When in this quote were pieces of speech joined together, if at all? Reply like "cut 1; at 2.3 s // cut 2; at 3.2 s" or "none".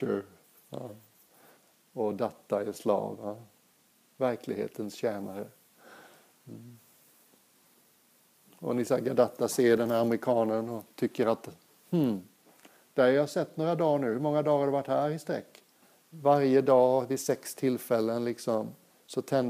cut 1; at 15.9 s